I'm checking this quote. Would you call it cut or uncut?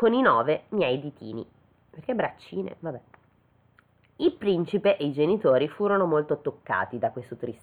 uncut